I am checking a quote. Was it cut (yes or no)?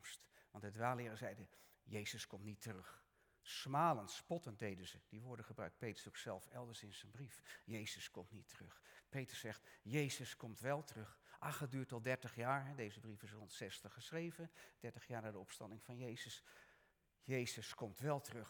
no